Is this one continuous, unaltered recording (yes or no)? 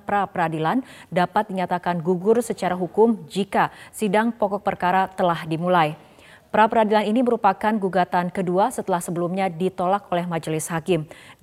yes